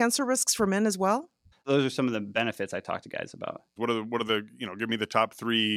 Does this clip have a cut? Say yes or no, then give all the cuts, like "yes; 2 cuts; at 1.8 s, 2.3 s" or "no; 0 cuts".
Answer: yes; 2 cuts; at 1.5 s, 3.8 s